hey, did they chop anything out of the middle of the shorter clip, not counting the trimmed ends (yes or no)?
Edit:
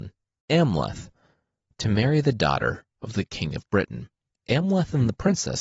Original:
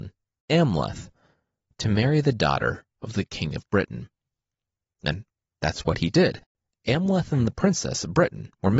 yes